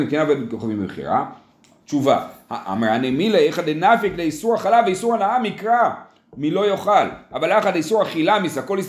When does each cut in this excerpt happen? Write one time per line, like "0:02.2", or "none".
0:01.8